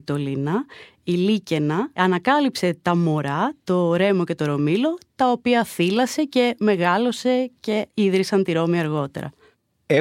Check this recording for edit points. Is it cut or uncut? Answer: uncut